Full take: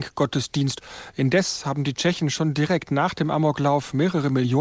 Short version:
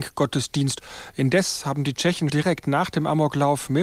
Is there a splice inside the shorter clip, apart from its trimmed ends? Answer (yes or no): yes